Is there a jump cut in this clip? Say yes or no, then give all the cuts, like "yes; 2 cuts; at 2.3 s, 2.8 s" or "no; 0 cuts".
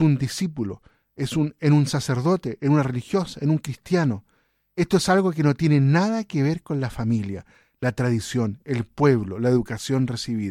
no; 0 cuts